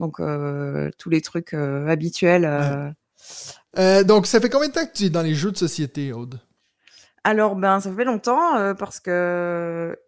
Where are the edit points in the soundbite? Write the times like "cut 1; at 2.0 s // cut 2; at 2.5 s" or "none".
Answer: cut 1; at 3.7 s